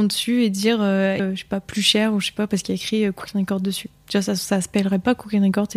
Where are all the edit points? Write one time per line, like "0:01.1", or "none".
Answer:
0:01.2